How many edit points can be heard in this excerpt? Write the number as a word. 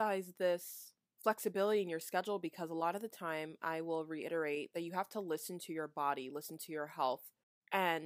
zero